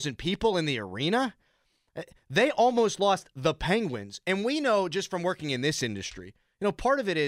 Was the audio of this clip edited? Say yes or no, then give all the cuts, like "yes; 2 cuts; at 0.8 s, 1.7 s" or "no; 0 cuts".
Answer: no; 0 cuts